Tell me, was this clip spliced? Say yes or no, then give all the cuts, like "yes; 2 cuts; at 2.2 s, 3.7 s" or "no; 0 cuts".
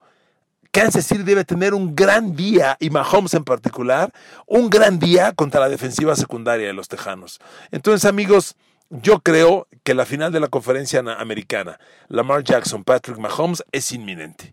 no; 0 cuts